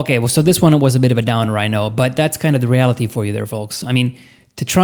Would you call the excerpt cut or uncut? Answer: uncut